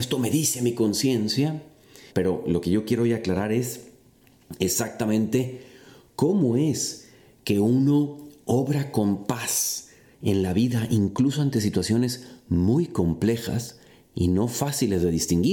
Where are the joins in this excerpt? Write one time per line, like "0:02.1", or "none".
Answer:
0:02.1